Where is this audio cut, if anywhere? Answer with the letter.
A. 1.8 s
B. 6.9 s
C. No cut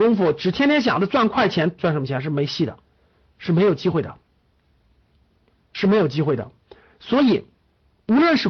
A